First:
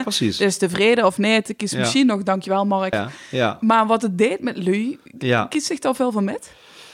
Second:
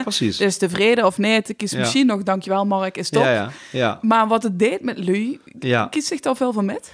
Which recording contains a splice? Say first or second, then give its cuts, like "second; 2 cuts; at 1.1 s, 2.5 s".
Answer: first; 1 cut; at 2.9 s